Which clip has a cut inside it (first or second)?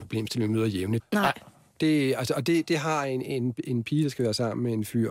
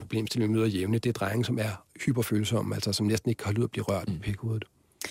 first